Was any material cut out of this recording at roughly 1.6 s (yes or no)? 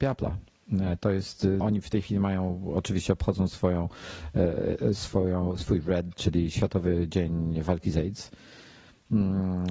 yes